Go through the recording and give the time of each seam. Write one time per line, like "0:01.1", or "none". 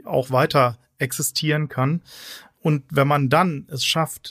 none